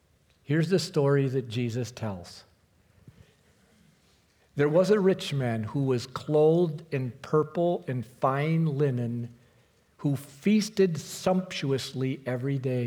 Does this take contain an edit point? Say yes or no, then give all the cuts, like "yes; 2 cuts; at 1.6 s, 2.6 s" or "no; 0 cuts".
no; 0 cuts